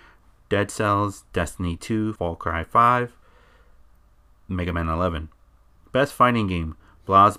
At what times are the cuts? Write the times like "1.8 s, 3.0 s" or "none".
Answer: 2.2 s, 5.7 s